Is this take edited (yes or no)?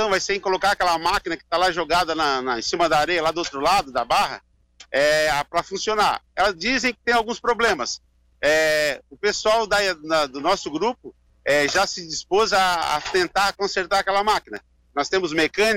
no